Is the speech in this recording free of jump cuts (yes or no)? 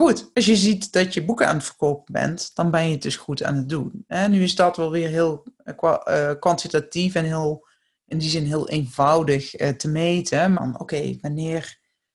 no